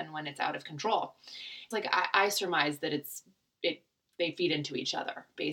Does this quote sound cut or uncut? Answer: cut